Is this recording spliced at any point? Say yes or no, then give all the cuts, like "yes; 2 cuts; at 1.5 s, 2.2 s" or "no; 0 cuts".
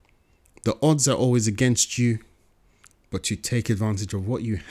no; 0 cuts